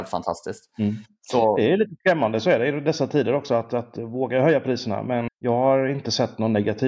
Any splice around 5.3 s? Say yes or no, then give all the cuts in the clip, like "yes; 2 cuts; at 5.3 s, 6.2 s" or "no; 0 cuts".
yes; 1 cut; at 5.3 s